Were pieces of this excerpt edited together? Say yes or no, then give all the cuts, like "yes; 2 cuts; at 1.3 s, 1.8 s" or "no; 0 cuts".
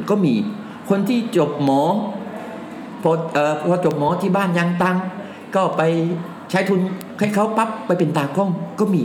no; 0 cuts